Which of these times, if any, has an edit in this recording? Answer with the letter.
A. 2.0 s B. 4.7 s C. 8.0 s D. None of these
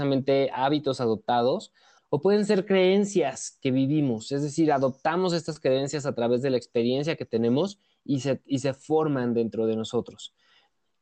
A